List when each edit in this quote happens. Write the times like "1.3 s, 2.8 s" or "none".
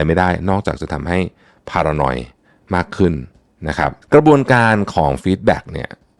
4.0 s